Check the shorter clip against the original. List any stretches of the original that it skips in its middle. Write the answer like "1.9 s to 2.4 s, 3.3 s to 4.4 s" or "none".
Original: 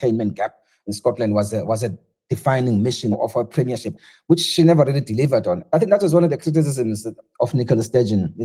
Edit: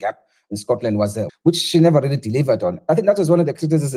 1.7 s to 4.1 s